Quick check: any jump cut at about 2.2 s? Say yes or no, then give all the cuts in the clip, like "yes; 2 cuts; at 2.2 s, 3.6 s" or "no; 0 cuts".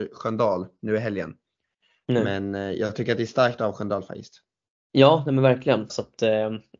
no; 2 cuts; at 4.7 s, 5.9 s